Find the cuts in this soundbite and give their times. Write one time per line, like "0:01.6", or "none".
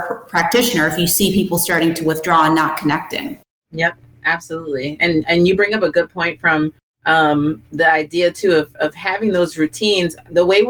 none